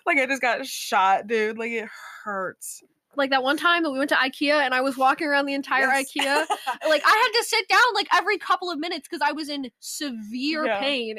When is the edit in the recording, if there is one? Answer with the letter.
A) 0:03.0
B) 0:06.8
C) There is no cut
C